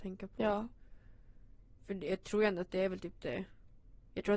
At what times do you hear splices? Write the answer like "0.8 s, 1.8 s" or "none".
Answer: none